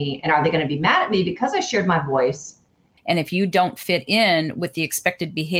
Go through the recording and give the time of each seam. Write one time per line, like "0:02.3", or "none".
0:03.0